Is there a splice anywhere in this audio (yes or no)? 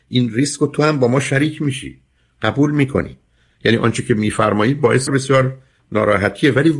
yes